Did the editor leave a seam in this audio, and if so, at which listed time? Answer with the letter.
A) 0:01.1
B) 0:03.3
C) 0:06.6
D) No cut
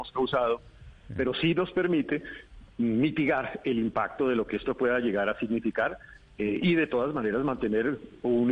A